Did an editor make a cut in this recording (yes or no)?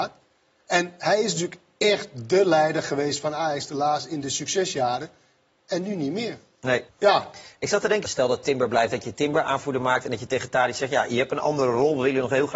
yes